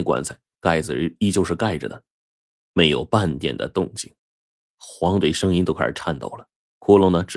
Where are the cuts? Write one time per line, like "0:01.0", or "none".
0:04.7

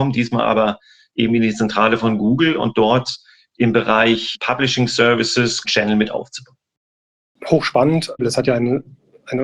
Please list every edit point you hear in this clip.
0:05.6
0:08.2

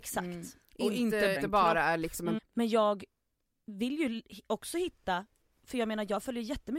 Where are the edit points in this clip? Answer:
0:01.4
0:02.4

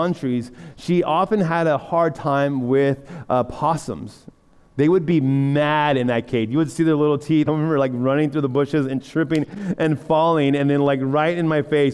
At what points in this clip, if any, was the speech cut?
0:04.6
0:07.5

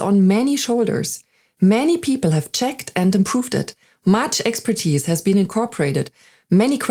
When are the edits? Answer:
none

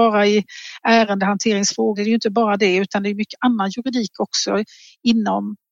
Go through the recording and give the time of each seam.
0:01.9

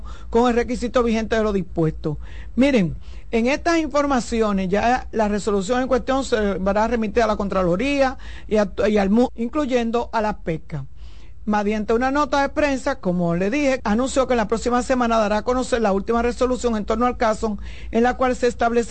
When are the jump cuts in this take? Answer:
0:09.3
0:13.8

